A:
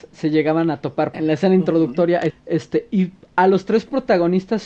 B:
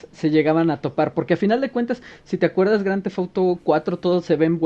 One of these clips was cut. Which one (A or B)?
A